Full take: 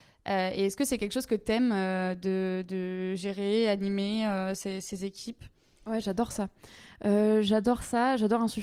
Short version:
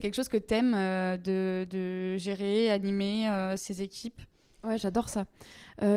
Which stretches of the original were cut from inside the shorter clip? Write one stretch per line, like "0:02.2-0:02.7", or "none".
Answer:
0:04.6-0:04.8